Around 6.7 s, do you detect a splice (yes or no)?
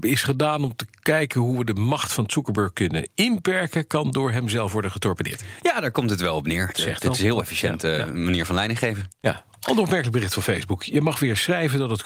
yes